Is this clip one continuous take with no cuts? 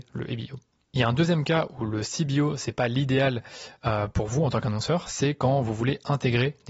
yes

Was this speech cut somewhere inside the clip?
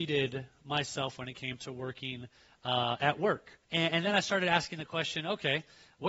yes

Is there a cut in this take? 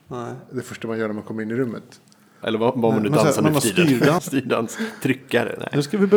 yes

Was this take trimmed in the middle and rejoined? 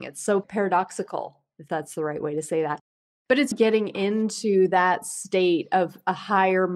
yes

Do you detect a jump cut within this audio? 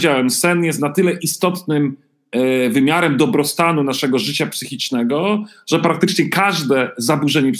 no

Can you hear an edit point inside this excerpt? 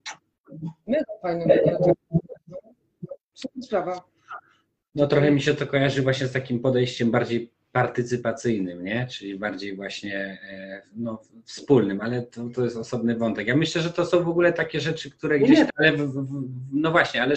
yes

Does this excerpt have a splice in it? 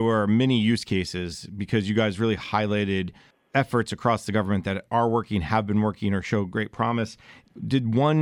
no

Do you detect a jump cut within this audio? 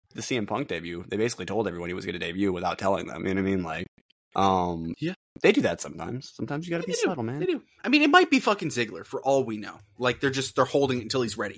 no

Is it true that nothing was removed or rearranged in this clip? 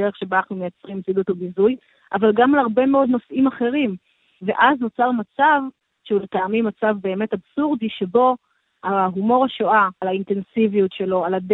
no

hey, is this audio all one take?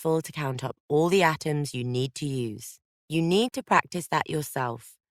no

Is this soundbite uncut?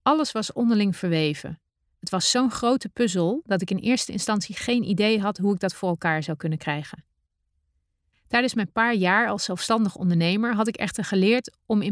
yes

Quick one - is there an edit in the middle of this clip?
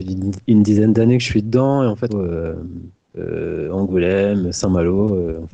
yes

